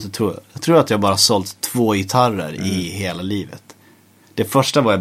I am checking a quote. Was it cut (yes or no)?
no